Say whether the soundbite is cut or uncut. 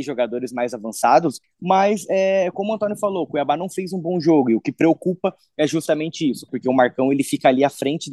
cut